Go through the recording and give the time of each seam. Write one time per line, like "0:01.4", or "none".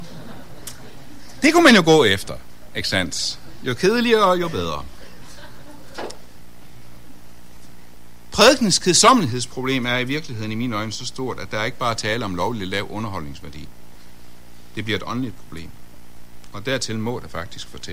none